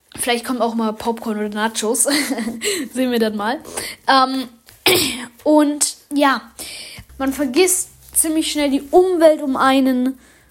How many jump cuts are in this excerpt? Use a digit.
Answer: 1